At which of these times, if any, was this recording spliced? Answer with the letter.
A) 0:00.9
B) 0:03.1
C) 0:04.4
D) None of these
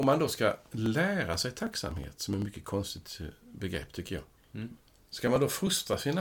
D